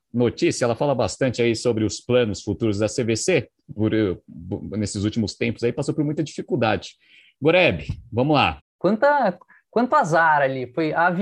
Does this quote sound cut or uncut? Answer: cut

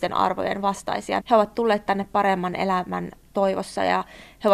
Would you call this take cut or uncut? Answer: cut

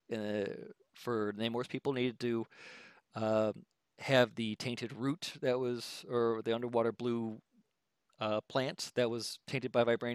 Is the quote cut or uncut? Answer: uncut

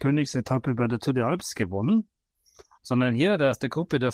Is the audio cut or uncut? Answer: cut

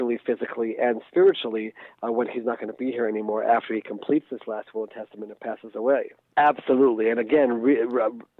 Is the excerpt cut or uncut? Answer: cut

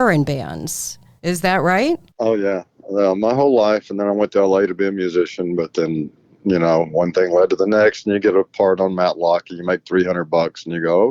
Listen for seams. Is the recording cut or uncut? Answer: uncut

